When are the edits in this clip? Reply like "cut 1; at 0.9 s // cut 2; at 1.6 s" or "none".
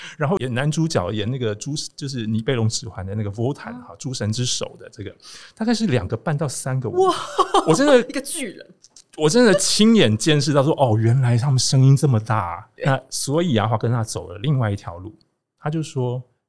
cut 1; at 12.8 s